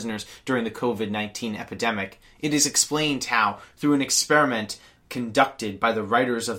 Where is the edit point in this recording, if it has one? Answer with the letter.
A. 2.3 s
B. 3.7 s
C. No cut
C